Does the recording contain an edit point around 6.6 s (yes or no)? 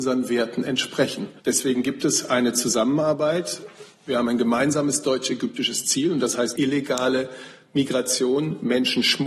yes